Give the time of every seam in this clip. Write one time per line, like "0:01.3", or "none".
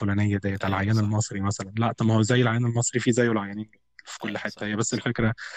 none